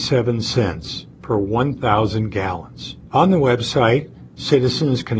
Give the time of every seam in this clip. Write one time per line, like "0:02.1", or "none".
0:03.1